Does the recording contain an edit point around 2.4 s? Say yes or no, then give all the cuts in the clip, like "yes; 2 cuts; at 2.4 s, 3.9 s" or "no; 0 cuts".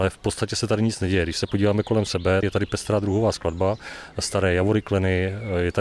yes; 1 cut; at 2.4 s